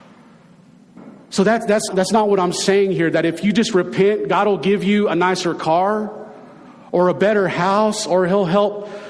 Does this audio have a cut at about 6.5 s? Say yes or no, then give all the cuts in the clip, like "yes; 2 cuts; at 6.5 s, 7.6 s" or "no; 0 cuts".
no; 1 cut; at 1.9 s